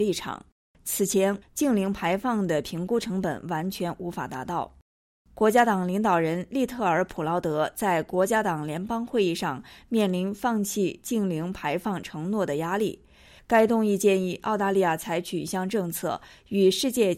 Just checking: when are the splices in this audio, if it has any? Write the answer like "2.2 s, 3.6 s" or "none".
1.4 s, 13.4 s